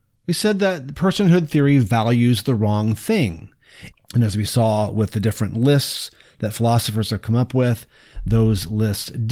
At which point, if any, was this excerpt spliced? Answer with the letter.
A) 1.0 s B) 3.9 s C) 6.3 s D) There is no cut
B